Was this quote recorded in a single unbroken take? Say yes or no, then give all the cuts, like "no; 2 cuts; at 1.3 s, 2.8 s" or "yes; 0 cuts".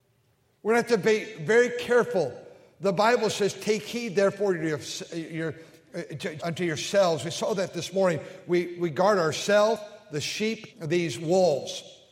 no; 2 cuts; at 6.4 s, 10.7 s